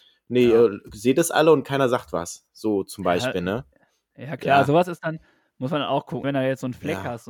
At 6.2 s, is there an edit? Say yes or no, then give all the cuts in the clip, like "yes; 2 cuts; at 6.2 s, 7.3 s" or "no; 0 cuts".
yes; 1 cut; at 6.2 s